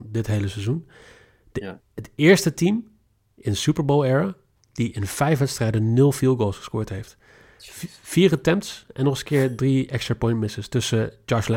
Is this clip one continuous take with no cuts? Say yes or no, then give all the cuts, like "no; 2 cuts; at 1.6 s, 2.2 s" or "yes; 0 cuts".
yes; 0 cuts